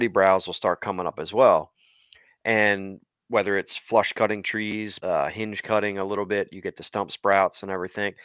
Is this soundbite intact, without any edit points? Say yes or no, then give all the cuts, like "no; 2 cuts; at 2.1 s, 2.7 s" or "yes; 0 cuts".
no; 1 cut; at 5.0 s